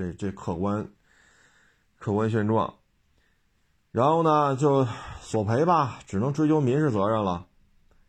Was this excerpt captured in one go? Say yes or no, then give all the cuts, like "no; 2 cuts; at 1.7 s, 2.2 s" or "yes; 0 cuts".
yes; 0 cuts